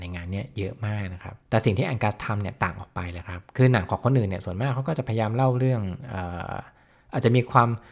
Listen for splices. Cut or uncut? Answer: cut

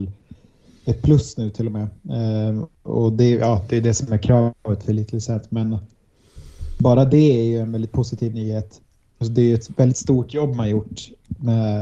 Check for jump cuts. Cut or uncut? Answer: uncut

